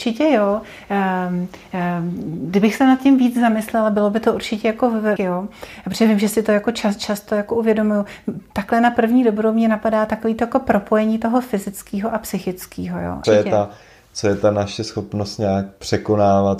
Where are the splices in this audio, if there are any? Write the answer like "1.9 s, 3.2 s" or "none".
5.2 s, 13.2 s